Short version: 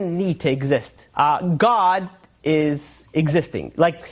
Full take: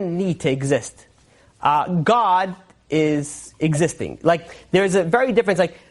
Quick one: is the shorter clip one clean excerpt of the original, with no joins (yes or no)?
no